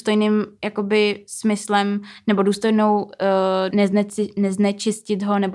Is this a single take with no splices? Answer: no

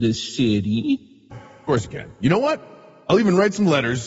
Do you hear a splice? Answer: yes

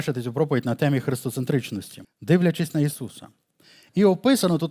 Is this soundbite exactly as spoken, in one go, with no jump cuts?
no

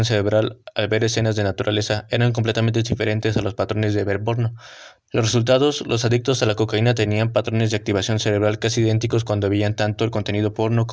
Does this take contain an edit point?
yes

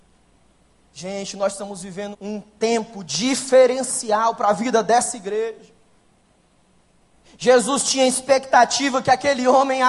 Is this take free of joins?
no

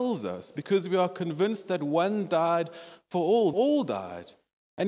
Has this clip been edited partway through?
yes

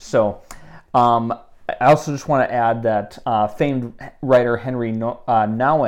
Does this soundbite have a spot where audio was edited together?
no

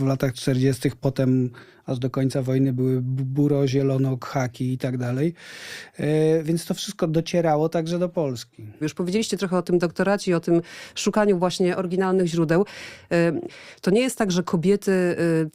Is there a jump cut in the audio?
yes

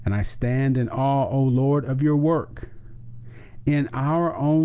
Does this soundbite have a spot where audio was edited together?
no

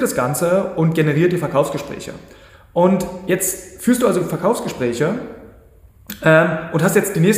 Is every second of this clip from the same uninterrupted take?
yes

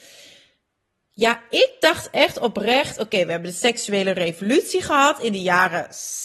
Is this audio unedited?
yes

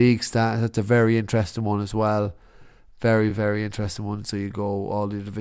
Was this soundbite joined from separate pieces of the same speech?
no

